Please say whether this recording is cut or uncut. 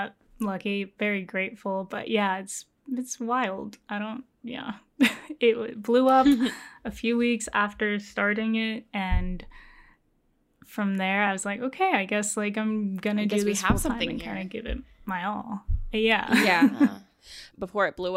uncut